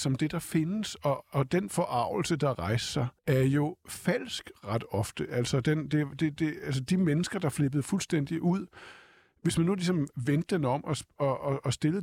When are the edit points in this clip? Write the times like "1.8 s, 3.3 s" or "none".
3.2 s